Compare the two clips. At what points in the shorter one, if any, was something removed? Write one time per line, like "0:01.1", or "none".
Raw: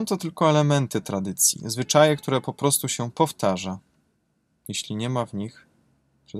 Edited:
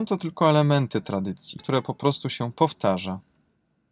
0:01.6